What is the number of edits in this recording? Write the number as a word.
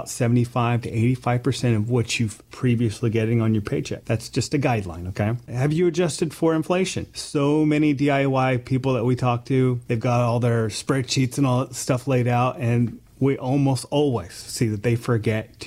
zero